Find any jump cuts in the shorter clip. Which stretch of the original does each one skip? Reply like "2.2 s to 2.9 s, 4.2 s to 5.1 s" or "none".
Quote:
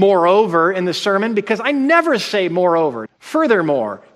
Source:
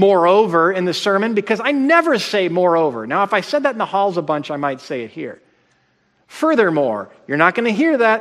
3.1 s to 6.1 s